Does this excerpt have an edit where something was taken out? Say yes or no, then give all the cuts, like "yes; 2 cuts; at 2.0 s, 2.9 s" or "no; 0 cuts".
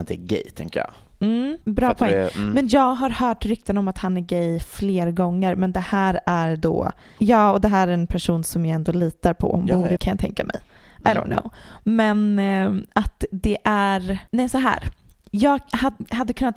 yes; 3 cuts; at 1.6 s, 7.2 s, 10.0 s